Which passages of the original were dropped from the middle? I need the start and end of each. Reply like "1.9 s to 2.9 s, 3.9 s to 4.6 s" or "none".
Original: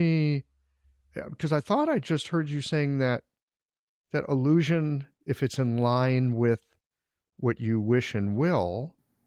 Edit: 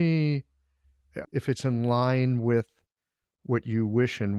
1.2 s to 5.2 s